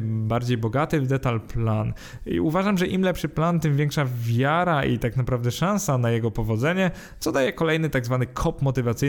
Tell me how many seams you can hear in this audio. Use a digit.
0